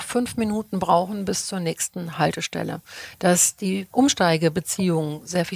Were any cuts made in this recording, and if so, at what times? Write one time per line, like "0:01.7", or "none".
none